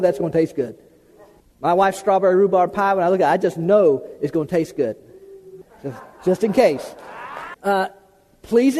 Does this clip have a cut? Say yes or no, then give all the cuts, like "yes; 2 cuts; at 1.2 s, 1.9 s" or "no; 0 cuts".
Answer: yes; 1 cut; at 7.5 s